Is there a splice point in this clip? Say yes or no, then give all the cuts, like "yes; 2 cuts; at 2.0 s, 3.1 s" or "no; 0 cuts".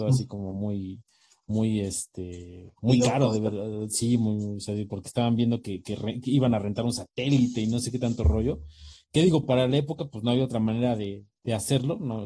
no; 0 cuts